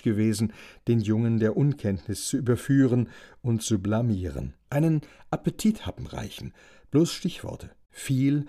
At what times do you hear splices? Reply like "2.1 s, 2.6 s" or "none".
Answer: 4.7 s